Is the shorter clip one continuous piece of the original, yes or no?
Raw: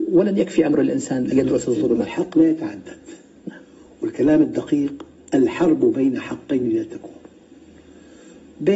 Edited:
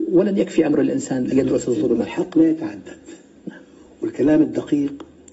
yes